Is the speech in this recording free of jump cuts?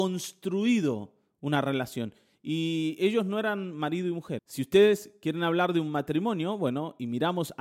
no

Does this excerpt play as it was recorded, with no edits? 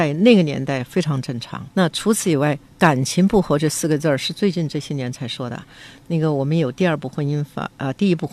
no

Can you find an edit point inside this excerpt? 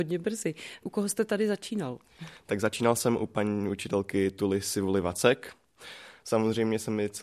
no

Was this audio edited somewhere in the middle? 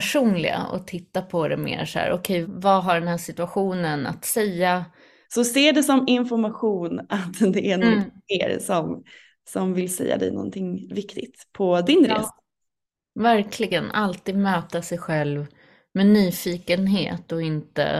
yes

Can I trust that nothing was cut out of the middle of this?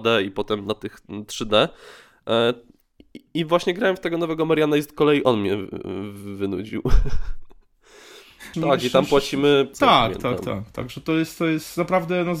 no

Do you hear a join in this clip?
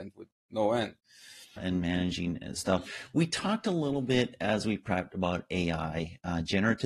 yes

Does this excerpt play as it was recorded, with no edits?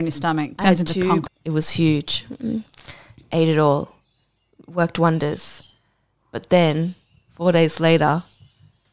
no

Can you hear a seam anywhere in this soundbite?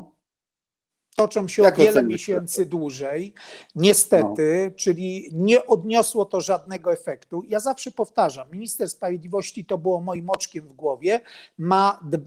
no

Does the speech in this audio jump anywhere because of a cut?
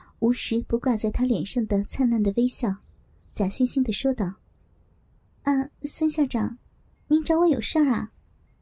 no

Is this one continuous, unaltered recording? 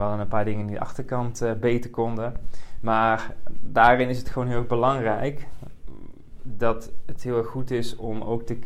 yes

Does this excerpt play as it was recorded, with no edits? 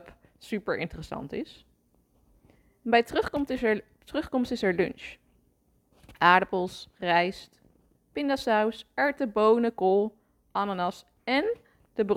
yes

